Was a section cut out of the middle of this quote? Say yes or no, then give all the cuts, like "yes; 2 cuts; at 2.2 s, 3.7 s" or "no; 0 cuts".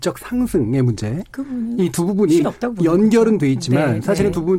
yes; 1 cut; at 2.4 s